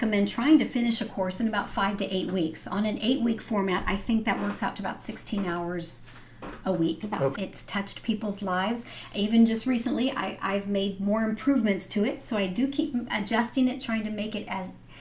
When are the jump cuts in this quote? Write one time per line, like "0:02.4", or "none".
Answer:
0:07.3